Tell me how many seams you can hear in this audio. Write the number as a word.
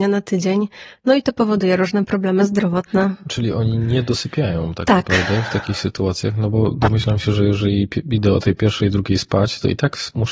zero